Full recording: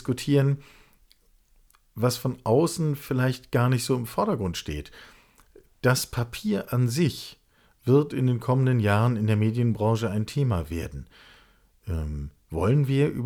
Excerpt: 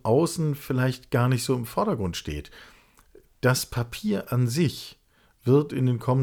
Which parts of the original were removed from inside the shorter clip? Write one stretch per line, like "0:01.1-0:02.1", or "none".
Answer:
none